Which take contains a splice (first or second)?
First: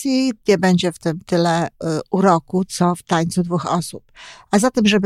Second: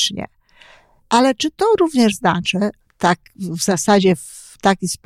second